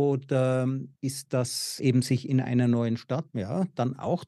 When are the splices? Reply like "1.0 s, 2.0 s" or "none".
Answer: 1.8 s, 3.3 s